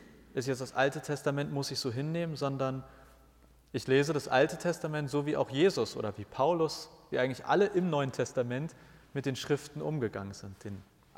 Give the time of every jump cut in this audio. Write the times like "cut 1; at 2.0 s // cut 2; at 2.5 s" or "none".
none